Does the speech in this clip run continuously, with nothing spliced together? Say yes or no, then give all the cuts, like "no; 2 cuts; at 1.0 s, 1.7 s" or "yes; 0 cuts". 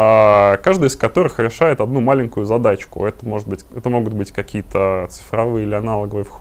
yes; 0 cuts